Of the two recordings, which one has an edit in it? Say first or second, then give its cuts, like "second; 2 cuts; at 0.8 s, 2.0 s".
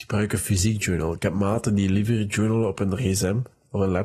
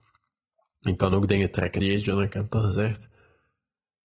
second; 1 cut; at 1.8 s